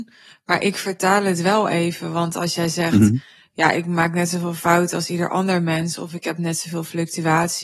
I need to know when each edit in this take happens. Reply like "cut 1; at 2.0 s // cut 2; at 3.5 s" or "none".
none